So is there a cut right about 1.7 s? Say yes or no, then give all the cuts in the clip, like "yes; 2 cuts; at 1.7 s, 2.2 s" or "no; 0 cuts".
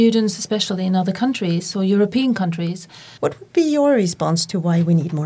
no; 1 cut; at 3.2 s